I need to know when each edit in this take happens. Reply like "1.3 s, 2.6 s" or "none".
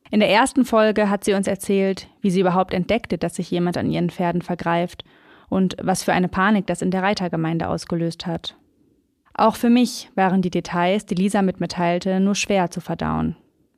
none